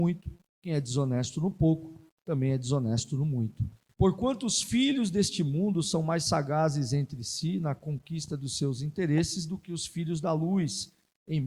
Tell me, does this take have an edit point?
yes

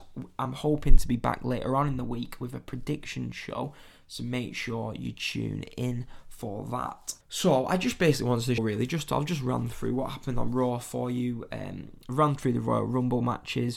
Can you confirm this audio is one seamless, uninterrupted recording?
no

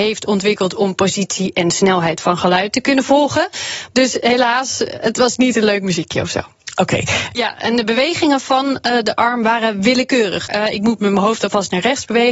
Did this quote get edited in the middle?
yes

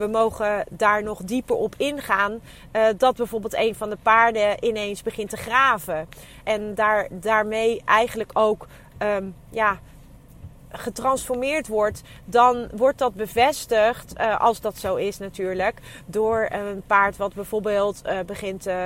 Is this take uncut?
no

